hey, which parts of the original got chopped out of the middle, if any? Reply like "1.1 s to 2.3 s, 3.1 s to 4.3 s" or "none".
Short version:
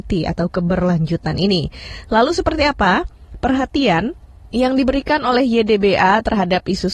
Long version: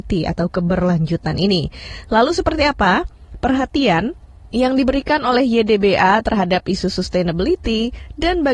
none